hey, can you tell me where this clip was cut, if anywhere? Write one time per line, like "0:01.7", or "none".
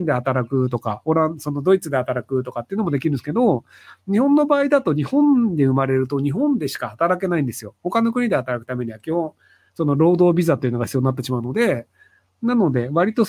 none